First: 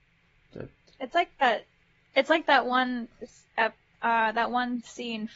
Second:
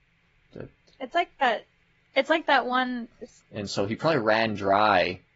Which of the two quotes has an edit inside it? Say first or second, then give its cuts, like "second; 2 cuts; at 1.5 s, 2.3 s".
second; 1 cut; at 3.4 s